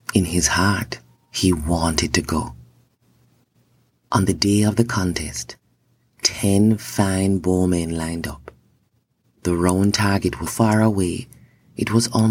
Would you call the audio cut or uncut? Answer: cut